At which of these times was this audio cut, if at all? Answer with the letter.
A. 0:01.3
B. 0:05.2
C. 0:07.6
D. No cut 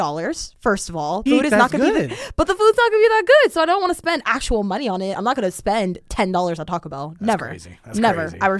A